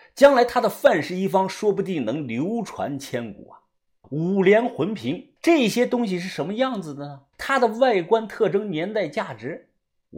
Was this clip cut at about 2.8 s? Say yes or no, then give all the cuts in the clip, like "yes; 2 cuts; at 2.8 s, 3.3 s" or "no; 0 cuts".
no; 3 cuts; at 4.0 s, 5.4 s, 7.3 s